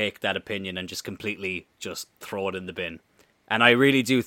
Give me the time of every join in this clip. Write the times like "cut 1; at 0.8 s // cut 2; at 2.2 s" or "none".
cut 1; at 3.3 s